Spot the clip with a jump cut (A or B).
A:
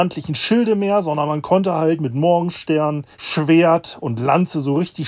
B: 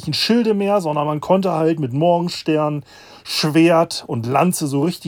A